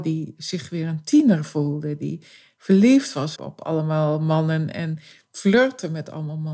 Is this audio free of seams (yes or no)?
no